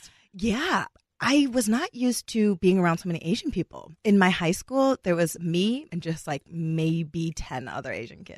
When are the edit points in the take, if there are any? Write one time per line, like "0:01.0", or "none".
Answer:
0:05.9